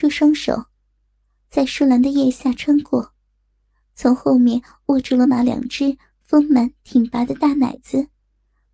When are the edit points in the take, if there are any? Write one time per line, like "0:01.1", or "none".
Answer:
0:05.2